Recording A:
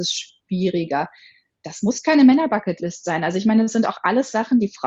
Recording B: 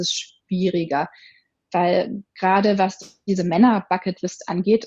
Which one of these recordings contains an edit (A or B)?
A